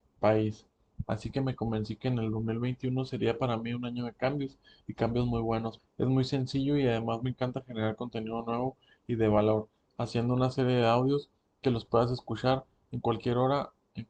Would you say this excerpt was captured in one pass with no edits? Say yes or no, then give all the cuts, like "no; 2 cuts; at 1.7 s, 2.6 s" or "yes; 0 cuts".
no; 2 cuts; at 1.0 s, 5.8 s